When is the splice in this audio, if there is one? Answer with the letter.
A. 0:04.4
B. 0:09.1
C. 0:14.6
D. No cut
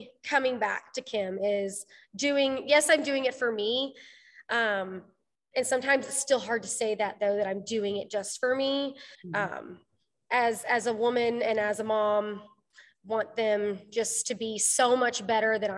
B